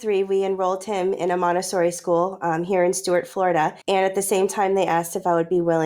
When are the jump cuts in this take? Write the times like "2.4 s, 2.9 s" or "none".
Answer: 3.8 s

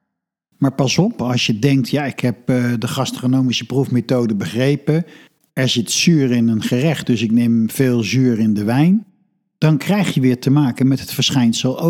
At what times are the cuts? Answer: none

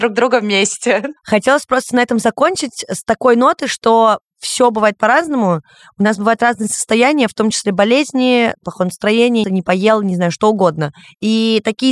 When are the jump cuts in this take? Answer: 9.4 s

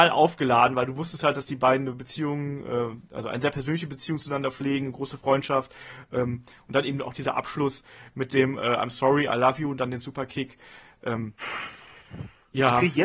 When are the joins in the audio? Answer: none

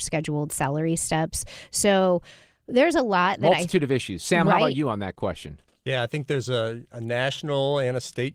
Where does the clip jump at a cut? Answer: none

